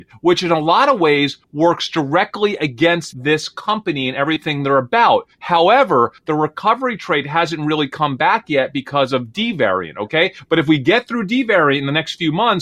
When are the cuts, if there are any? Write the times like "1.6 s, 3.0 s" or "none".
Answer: none